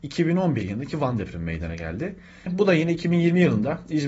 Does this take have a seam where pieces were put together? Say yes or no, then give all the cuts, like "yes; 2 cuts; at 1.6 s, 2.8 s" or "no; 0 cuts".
yes; 1 cut; at 2.5 s